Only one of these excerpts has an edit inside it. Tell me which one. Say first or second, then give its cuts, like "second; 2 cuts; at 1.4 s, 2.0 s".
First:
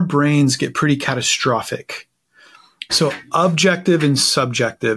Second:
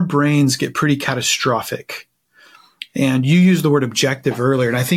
first; 1 cut; at 2.9 s